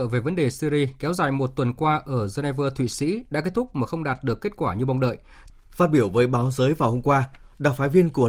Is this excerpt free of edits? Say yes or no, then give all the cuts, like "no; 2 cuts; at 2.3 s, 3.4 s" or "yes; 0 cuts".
no; 1 cut; at 5.5 s